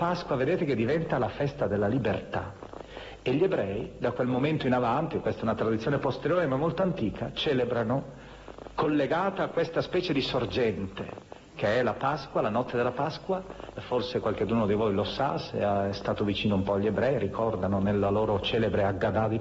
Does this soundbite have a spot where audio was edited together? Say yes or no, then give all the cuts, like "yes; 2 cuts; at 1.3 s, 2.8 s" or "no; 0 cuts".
yes; 1 cut; at 13.8 s